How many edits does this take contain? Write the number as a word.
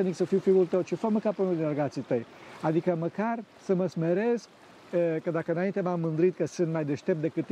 one